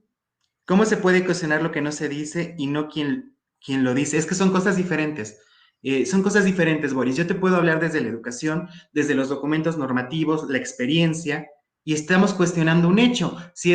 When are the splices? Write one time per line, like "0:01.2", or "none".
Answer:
none